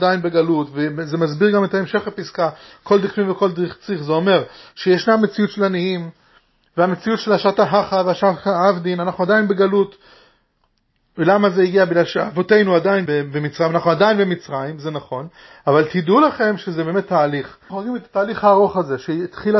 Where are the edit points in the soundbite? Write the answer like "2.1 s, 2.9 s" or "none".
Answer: 13.1 s, 17.7 s